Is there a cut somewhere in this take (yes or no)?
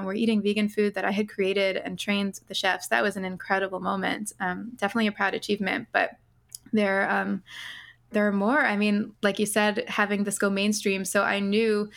yes